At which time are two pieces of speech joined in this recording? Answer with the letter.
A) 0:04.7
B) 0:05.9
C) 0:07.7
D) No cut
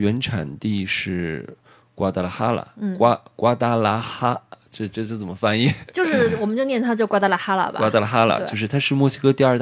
D